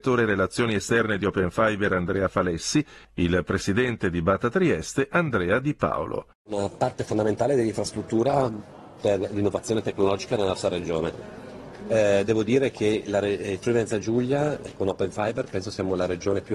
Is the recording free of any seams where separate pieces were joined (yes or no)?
yes